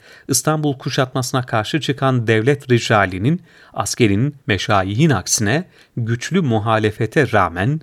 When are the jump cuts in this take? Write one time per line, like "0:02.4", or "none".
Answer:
0:04.4